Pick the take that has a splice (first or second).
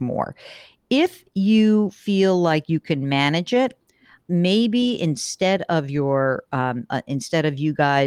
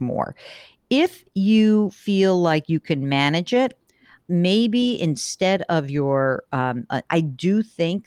second